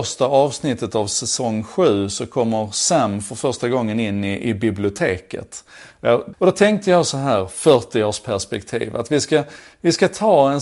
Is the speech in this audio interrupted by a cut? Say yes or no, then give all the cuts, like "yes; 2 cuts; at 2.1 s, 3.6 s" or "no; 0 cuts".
yes; 1 cut; at 6.3 s